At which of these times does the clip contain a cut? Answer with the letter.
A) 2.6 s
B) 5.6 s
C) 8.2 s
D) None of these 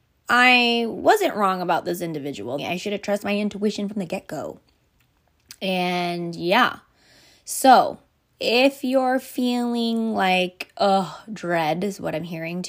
A